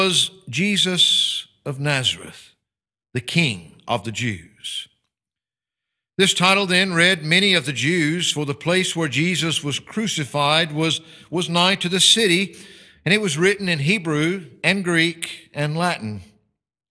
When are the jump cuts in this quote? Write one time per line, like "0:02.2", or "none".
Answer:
none